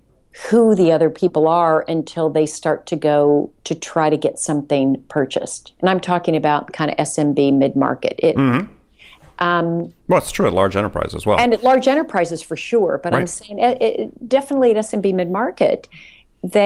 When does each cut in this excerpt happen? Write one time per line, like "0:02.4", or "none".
none